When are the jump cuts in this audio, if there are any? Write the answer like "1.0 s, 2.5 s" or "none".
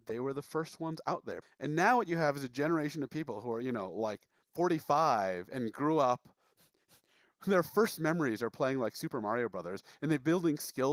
1.4 s